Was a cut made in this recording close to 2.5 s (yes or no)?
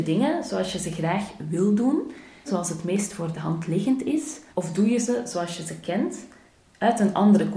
yes